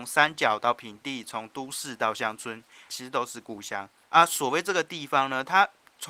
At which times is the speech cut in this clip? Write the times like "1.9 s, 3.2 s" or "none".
2.9 s

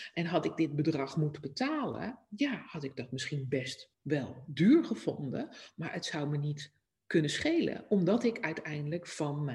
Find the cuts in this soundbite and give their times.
3.9 s

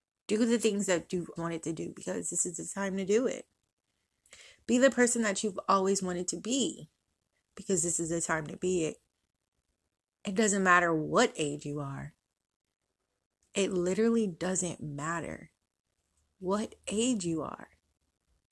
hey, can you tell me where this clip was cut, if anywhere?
1.4 s

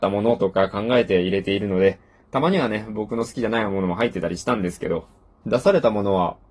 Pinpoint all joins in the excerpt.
5.4 s

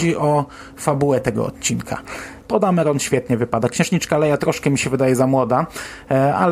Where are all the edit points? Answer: 2.4 s

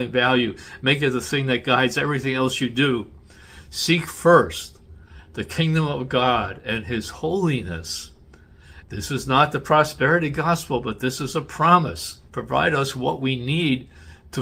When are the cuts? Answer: 8.8 s, 12.3 s

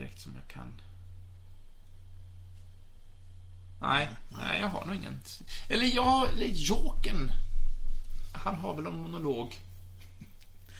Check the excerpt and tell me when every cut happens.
none

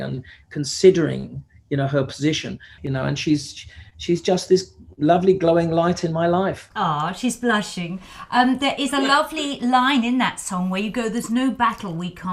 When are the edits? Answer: 2.8 s

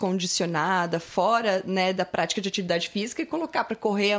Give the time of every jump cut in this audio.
none

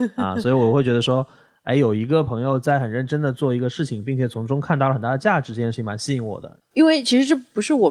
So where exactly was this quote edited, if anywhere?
6.6 s

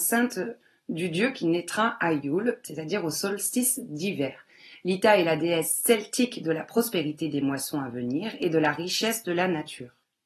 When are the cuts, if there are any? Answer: none

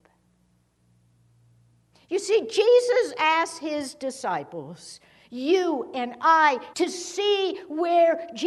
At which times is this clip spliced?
6.7 s

